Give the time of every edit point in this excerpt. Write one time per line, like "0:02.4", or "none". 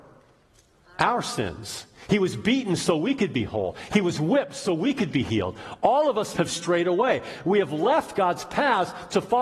0:06.3